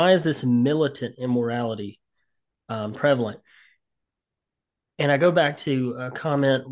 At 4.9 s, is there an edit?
no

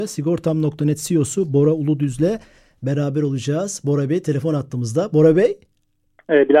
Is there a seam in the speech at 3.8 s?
no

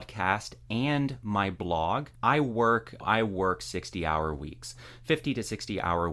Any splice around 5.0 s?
no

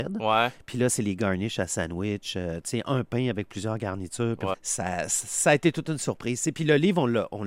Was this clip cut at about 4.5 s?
yes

